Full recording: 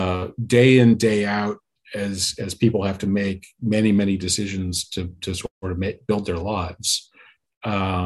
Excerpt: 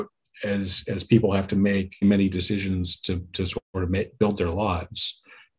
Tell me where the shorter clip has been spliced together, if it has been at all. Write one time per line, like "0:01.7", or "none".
0:02.0

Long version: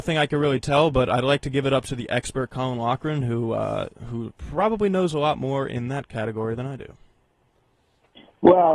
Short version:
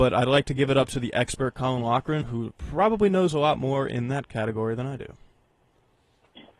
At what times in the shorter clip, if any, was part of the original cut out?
0:02.2

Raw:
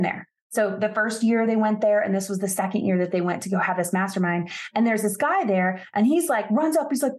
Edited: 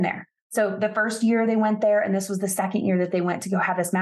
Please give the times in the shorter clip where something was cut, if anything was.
none

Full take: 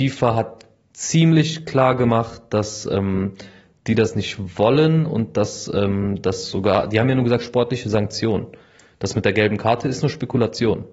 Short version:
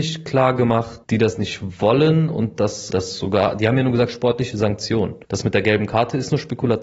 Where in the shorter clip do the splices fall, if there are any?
0:01.0
0:02.9
0:05.2

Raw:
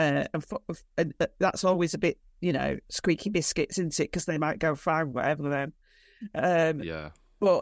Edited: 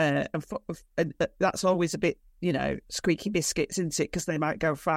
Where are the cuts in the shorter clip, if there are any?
none

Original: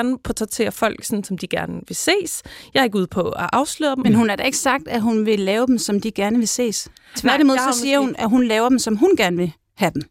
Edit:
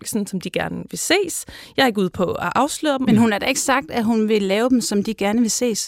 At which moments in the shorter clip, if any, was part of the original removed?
none

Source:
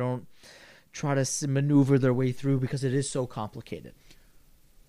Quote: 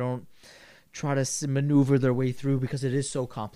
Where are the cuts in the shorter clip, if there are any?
none

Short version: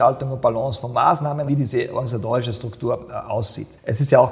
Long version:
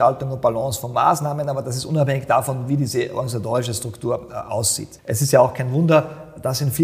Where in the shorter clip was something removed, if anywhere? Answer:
0:01.5

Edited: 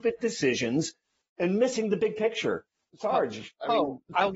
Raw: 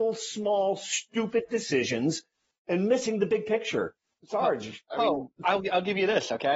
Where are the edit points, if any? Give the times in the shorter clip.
none

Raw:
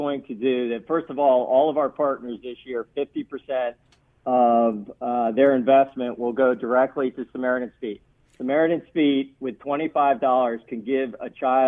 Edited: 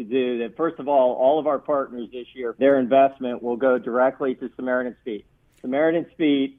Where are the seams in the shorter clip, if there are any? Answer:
0:02.6

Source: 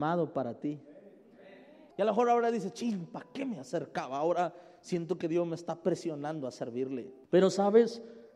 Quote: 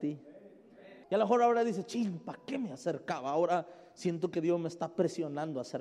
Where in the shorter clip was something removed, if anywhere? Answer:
0:01.0

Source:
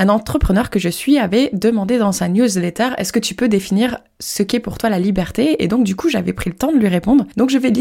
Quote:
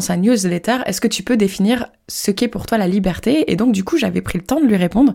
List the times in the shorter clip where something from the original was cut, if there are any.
none

